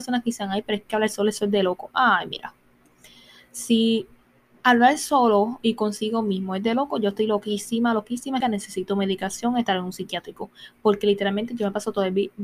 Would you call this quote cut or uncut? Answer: cut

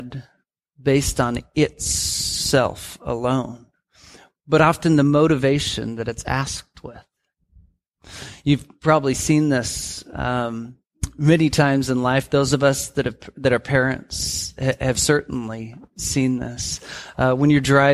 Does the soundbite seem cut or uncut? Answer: uncut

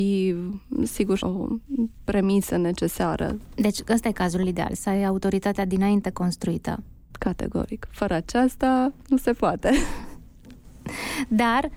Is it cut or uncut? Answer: cut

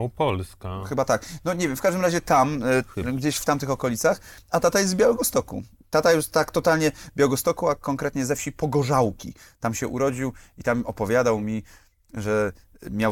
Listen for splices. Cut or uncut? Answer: uncut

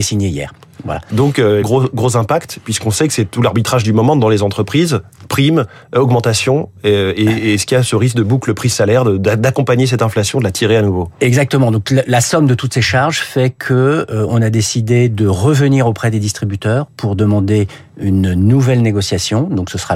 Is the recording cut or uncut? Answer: cut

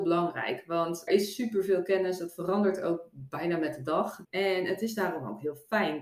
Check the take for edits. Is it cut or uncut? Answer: cut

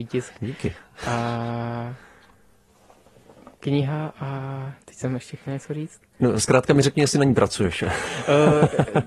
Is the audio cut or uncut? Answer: uncut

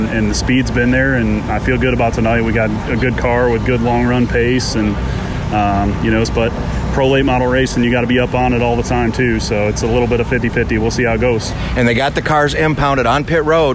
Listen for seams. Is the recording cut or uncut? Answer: cut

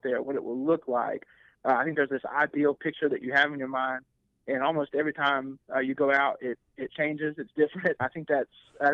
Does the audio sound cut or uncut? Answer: cut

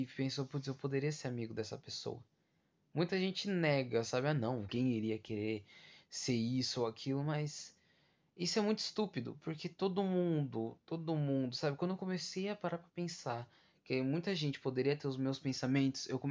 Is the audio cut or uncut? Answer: cut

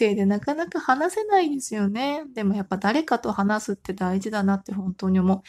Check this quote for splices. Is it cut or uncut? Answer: uncut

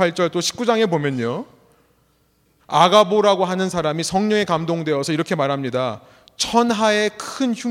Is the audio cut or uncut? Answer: cut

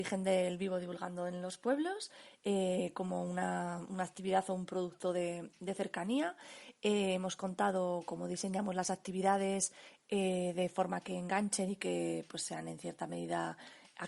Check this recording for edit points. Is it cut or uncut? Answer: uncut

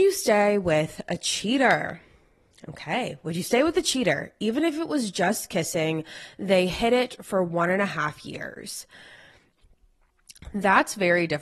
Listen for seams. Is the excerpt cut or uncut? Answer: uncut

